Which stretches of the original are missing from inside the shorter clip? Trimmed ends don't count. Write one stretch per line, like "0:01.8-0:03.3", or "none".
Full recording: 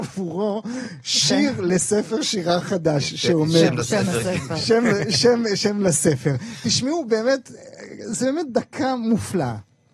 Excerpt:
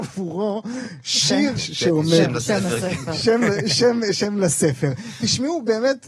0:01.6-0:03.0